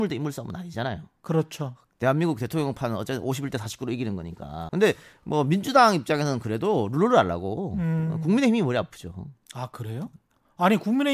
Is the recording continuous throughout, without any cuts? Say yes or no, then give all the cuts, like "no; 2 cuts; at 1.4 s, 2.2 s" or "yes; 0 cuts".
no; 1 cut; at 4.7 s